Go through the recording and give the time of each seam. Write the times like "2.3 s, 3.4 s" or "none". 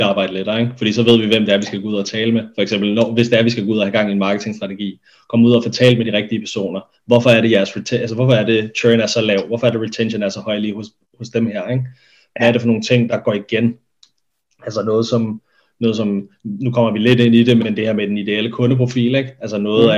13.1 s, 17.6 s